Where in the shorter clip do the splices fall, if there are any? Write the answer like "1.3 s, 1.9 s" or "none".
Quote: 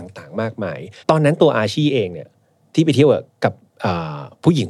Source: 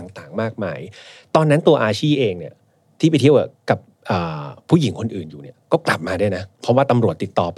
1.0 s